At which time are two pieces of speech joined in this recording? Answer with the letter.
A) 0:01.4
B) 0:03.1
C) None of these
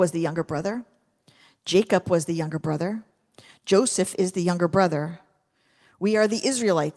C